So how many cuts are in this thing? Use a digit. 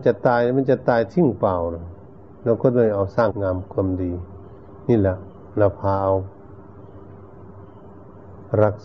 1